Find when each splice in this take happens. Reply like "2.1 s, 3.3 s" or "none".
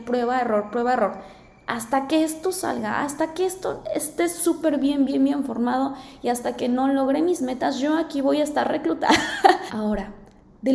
9.7 s